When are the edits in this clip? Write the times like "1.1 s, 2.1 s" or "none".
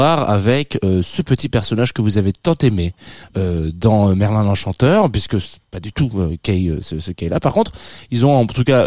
none